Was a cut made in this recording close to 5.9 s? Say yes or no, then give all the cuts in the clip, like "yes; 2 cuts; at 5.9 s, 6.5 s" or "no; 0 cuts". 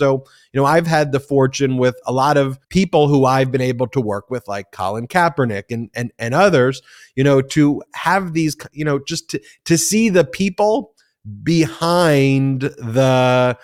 no; 1 cut; at 2.6 s